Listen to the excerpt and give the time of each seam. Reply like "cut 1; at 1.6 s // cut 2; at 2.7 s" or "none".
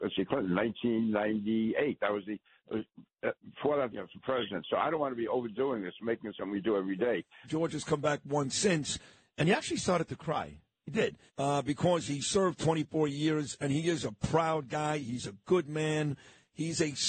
cut 1; at 3.9 s // cut 2; at 7.4 s // cut 3; at 11.3 s